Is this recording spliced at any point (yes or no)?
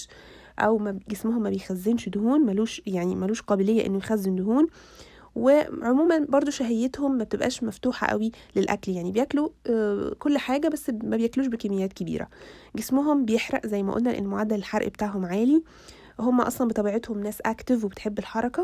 yes